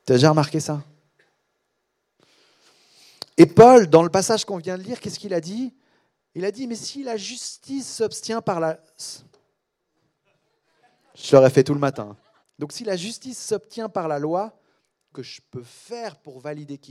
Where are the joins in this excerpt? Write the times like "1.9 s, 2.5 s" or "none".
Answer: 12.4 s, 15.1 s